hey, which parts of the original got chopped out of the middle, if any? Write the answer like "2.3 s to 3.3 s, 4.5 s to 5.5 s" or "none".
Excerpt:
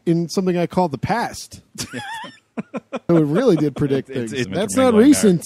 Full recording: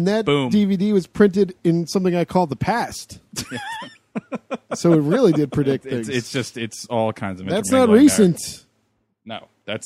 4.7 s to 4.9 s, 6.2 s to 7.4 s